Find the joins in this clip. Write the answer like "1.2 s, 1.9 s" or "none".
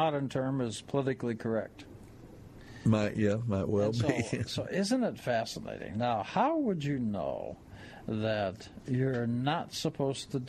none